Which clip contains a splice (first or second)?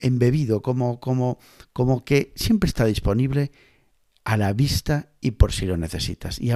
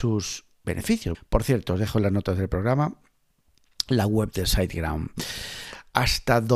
second